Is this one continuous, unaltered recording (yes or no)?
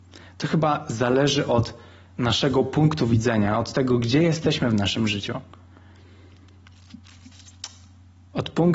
yes